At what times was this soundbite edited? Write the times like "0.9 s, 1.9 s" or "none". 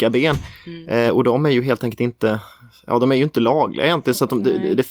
none